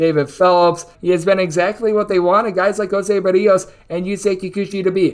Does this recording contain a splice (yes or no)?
yes